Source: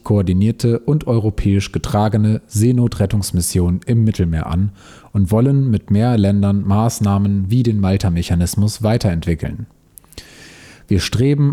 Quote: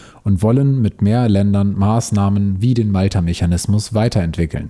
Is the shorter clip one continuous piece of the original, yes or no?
yes